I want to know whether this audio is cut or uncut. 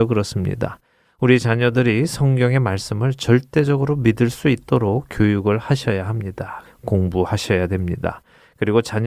cut